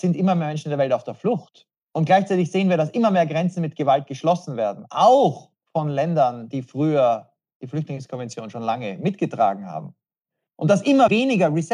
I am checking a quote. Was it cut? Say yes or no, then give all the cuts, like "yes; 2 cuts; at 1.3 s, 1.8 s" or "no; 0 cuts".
no; 0 cuts